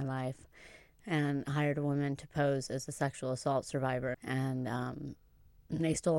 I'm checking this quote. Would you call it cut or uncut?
cut